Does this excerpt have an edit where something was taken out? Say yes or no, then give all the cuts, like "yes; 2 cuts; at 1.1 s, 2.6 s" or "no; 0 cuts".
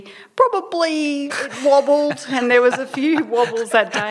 yes; 1 cut; at 1.3 s